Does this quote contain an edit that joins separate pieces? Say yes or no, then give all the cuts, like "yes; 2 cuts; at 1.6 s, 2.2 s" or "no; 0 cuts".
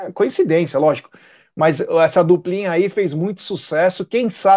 no; 0 cuts